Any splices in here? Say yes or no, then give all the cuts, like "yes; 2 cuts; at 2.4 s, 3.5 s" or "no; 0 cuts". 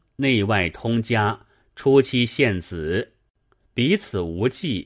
no; 0 cuts